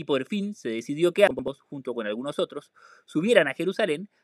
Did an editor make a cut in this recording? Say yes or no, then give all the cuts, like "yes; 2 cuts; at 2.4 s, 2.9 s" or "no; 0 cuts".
no; 0 cuts